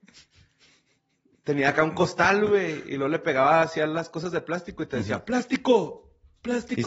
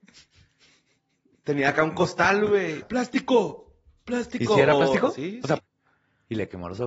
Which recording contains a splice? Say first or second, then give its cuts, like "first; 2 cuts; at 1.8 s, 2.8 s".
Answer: second; 2 cuts; at 2.8 s, 5.6 s